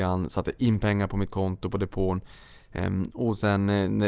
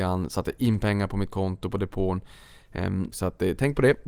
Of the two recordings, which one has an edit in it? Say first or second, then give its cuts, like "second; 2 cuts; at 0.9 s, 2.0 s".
second; 1 cut; at 3.1 s